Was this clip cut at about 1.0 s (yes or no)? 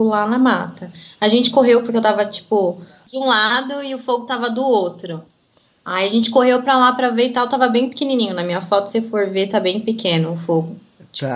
no